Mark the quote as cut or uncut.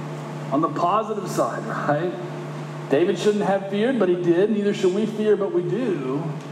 uncut